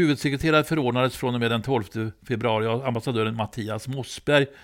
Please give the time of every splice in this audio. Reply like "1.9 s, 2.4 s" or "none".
none